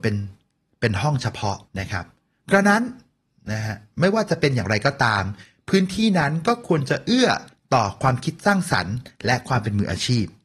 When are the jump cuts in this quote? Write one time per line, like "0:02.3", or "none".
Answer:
0:01.7